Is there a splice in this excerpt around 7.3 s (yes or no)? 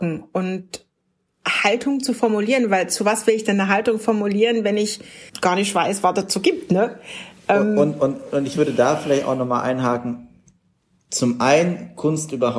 no